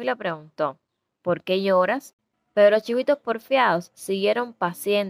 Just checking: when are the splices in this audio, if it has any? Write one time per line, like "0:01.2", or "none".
0:01.1
0:02.3